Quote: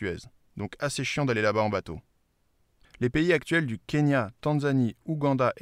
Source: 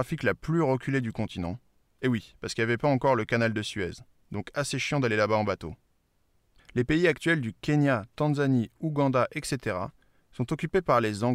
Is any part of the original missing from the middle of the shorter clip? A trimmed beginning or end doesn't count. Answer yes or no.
no